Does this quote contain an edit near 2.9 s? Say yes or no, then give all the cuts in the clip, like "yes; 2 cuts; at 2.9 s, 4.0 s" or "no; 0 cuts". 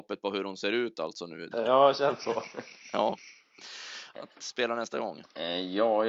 no; 2 cuts; at 1.5 s, 4.1 s